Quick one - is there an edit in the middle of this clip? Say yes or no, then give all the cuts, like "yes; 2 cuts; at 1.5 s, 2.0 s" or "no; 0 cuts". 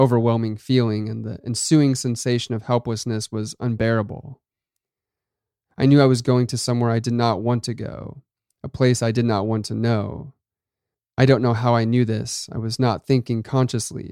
yes; 1 cut; at 5.6 s